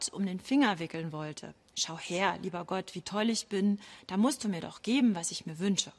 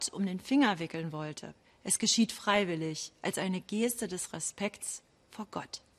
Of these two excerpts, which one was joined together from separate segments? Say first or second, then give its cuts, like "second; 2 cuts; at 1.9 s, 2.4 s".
second; 1 cut; at 1.6 s